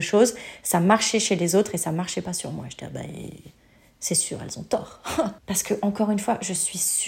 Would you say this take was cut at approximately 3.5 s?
no; 1 cut; at 5.4 s

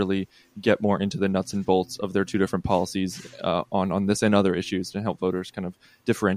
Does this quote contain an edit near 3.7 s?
no; 0 cuts

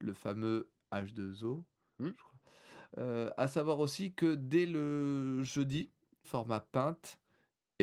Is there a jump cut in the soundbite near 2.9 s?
yes; 2 cuts; at 2.9 s, 6.2 s

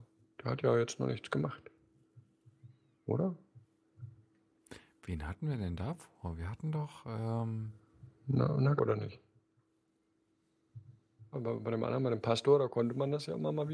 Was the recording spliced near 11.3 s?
yes; 2 cuts; at 8.8 s, 11.3 s

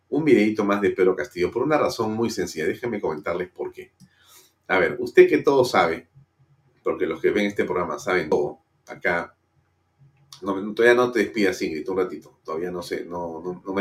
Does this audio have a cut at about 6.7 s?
no; 0 cuts

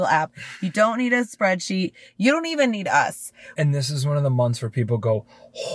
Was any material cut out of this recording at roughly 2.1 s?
no; 1 cut; at 3.6 s

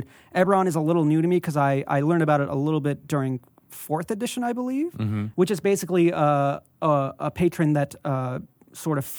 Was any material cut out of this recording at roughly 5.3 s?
yes; 1 cut; at 5.3 s

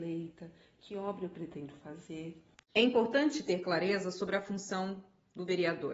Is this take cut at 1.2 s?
no; 1 cut; at 2.5 s

